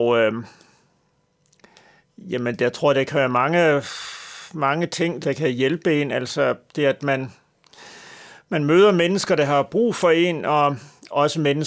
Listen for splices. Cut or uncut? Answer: cut